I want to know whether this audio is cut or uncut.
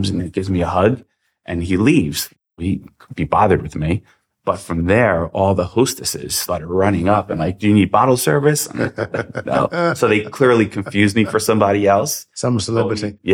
uncut